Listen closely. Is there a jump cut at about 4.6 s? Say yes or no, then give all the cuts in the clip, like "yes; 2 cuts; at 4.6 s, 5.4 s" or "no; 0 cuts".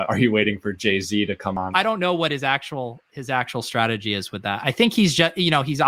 no; 1 cut; at 1.7 s